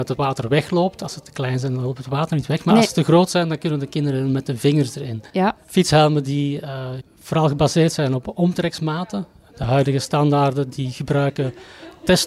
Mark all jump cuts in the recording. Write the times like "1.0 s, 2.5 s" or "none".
5.3 s, 7.0 s